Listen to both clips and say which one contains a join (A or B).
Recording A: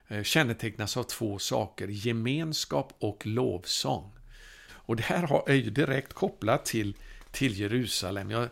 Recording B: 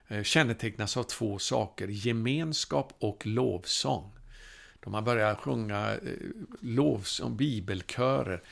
A